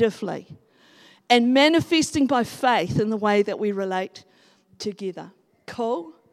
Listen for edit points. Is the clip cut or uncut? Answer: uncut